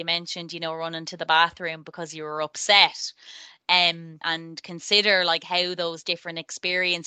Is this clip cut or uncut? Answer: cut